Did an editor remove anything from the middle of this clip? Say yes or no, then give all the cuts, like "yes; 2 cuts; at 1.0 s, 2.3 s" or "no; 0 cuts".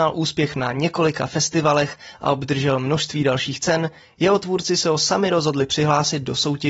no; 0 cuts